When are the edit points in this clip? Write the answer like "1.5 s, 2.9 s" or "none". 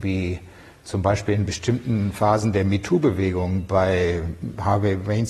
none